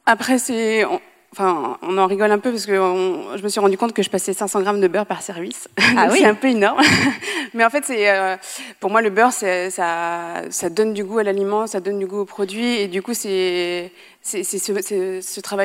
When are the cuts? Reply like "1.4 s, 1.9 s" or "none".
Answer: none